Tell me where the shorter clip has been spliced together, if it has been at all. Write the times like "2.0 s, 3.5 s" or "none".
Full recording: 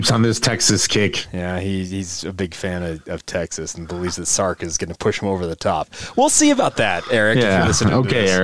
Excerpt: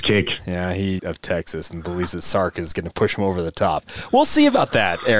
1.0 s